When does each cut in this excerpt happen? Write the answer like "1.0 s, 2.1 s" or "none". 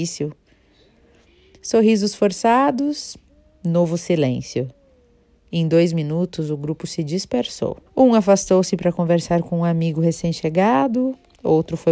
7.9 s